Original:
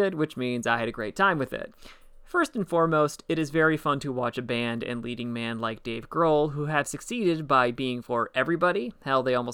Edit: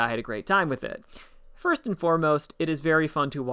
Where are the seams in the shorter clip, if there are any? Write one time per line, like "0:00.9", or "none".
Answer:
none